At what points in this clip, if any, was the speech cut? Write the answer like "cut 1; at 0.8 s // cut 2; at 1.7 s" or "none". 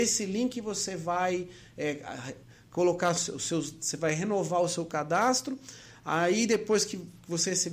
none